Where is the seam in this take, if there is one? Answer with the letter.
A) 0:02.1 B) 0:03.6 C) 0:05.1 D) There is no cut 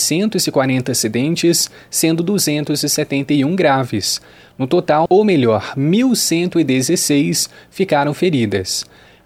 C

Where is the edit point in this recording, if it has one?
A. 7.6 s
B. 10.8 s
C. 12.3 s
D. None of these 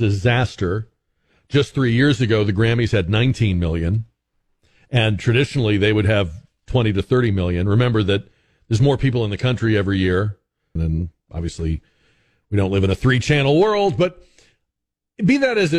B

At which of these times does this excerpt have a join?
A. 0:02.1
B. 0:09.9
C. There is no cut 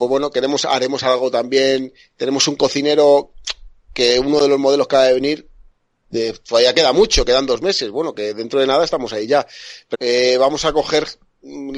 B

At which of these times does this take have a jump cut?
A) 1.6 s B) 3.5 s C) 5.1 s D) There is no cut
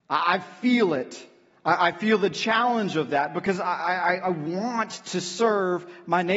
D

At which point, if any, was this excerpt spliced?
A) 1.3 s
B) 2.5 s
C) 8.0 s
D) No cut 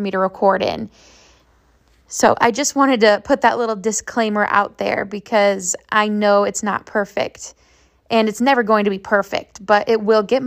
D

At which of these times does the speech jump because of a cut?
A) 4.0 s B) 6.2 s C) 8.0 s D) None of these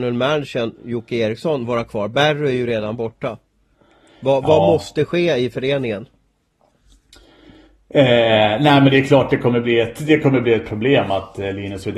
D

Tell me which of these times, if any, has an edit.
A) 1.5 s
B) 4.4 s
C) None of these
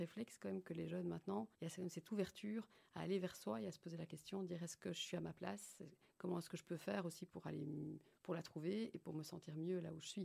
A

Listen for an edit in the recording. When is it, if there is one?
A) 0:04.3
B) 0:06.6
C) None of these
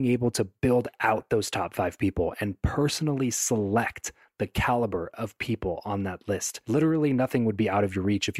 C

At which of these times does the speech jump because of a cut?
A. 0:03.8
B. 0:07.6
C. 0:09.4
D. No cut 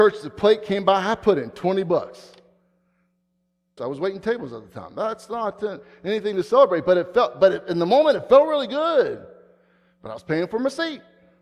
A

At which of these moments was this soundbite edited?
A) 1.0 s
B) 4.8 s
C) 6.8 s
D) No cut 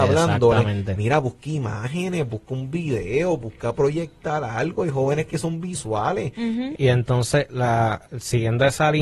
C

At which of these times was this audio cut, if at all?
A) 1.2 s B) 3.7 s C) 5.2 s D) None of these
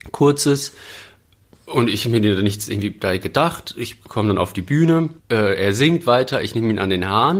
C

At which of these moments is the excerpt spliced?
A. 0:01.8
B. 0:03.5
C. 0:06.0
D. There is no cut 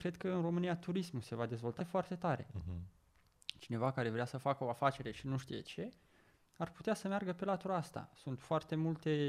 A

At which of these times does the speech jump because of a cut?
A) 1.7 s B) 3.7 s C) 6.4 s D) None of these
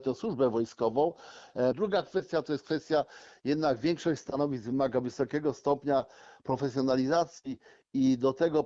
A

